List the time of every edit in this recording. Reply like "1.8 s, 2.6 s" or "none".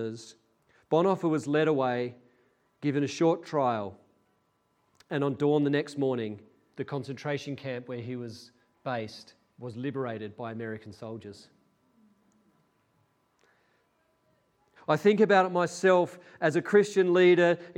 6.7 s, 14.8 s